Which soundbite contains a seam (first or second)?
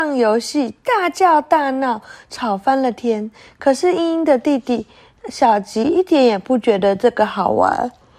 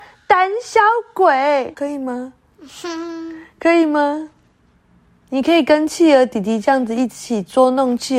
second